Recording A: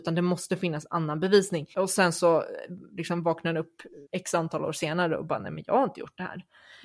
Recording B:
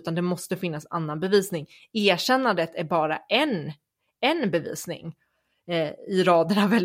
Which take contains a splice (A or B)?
A